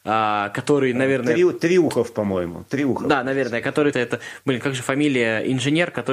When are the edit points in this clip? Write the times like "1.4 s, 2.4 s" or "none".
3.9 s